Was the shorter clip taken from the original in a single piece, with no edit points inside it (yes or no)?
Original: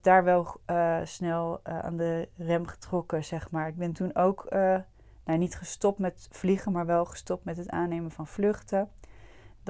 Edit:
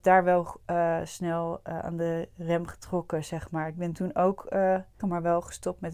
no